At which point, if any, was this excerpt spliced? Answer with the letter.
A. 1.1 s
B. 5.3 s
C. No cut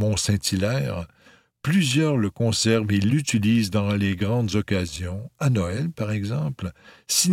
C